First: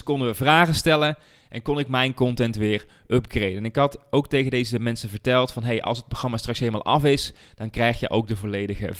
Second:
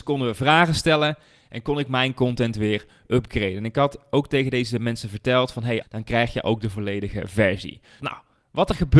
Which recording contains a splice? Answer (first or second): second